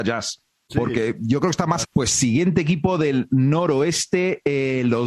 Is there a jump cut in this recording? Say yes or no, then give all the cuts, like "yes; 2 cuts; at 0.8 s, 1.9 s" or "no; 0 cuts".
yes; 1 cut; at 1.8 s